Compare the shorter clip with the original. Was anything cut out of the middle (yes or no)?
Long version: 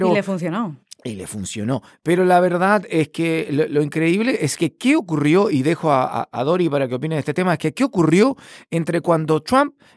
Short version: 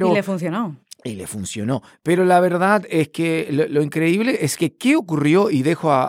no